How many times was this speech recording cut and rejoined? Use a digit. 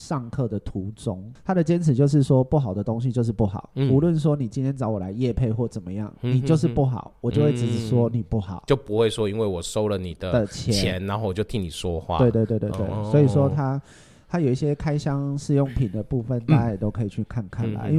1